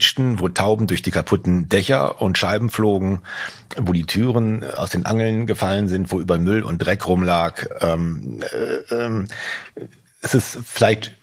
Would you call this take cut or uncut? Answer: uncut